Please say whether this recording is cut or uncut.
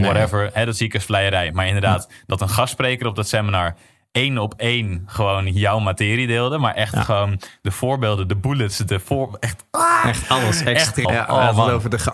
cut